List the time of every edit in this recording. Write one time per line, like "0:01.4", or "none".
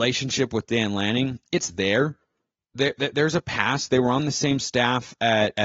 none